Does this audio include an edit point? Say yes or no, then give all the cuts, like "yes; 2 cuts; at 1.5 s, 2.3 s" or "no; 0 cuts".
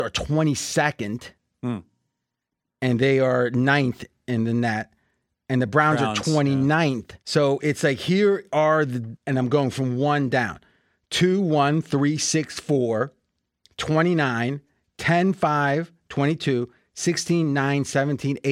yes; 2 cuts; at 7.2 s, 9.2 s